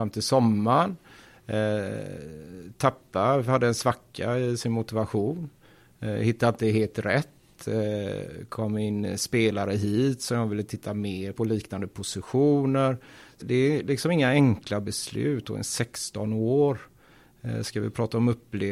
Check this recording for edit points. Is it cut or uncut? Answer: cut